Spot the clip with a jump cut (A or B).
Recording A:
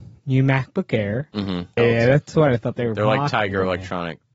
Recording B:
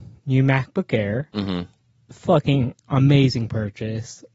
A